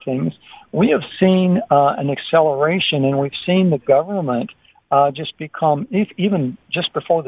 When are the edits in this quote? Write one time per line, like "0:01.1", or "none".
none